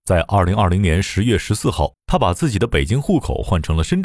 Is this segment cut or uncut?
cut